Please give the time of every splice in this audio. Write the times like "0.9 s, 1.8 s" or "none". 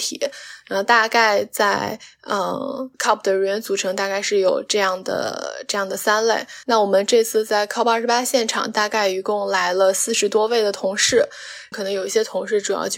2.9 s, 6.6 s, 11.7 s